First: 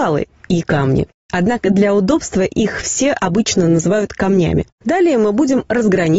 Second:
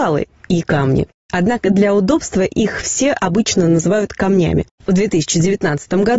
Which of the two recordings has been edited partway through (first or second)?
second